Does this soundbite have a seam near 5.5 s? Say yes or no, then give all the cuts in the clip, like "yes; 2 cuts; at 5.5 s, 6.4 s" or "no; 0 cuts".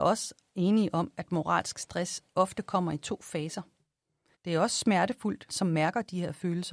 yes; 2 cuts; at 4.3 s, 5.5 s